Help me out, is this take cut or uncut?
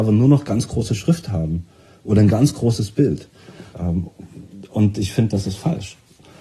cut